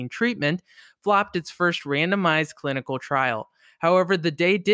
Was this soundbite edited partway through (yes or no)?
no